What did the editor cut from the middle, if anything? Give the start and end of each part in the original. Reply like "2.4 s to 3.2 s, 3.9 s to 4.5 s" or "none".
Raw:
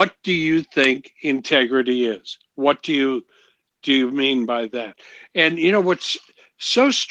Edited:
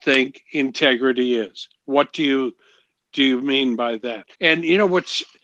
5.0 s to 5.3 s